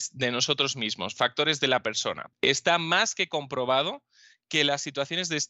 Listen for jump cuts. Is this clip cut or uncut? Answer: cut